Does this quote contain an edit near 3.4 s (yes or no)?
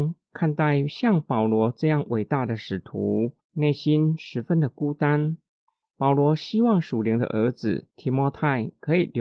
yes